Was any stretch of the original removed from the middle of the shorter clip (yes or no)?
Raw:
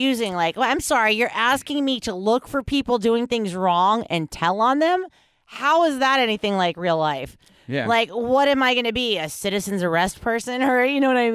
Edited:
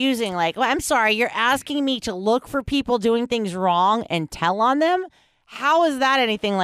no